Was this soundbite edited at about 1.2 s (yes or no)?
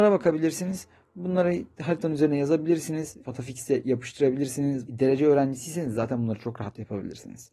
no